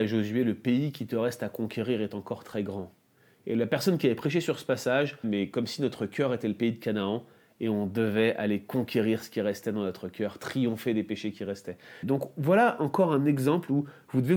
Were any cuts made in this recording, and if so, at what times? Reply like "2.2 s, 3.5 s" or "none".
5.2 s, 12.0 s